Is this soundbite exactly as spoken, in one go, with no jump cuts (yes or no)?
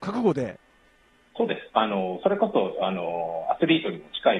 yes